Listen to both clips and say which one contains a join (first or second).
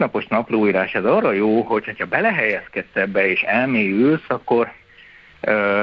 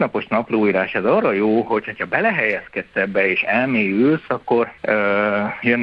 second